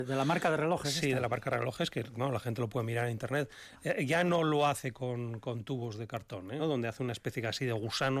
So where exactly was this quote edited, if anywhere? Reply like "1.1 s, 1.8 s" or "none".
6.6 s